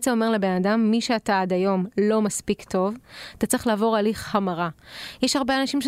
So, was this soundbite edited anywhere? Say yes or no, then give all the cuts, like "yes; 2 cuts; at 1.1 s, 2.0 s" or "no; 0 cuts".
no; 0 cuts